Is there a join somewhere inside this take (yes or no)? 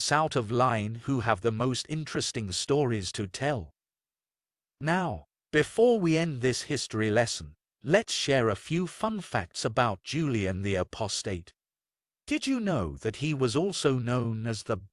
no